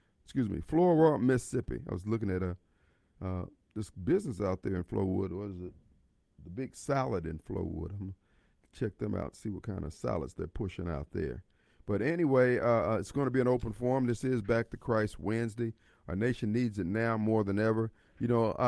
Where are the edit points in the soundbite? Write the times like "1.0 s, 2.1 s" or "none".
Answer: none